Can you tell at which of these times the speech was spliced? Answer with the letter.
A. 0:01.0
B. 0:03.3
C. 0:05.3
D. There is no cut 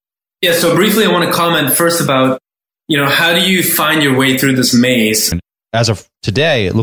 C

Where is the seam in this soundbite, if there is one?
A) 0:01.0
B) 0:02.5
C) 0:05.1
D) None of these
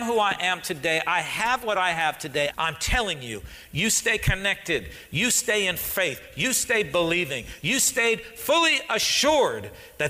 B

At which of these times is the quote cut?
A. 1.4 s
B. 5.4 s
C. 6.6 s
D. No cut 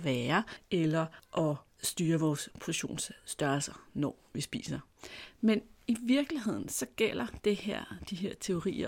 D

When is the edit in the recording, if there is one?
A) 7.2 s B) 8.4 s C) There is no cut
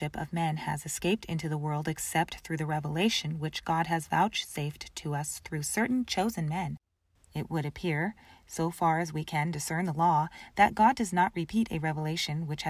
A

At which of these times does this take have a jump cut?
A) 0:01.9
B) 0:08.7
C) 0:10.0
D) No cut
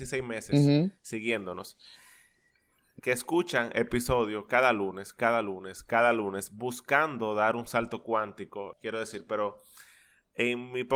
B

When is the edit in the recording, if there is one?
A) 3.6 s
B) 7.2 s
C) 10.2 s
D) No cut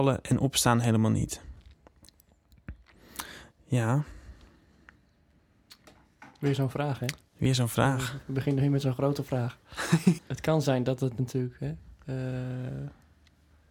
C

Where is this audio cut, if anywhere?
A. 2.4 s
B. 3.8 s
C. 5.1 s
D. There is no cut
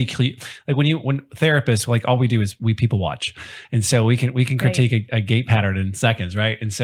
D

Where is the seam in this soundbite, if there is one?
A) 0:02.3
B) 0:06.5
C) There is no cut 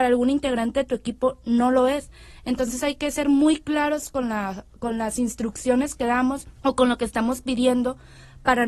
B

